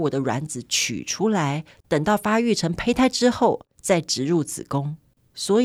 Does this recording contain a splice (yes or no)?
yes